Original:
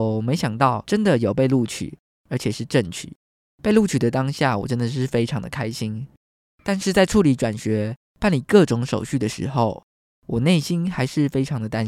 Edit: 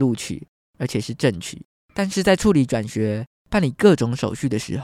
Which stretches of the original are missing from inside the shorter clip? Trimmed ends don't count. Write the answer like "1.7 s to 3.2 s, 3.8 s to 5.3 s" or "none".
3.3 s to 6.5 s